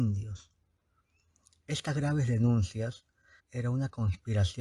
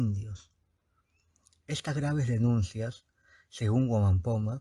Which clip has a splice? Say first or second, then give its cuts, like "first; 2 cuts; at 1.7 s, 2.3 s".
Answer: first; 1 cut; at 3.4 s